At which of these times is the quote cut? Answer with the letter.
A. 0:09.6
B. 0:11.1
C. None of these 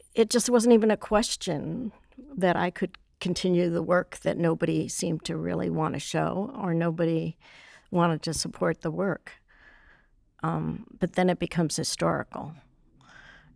C